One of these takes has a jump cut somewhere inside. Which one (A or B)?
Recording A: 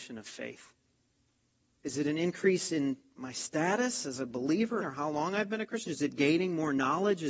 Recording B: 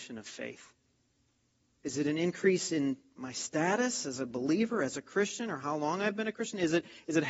A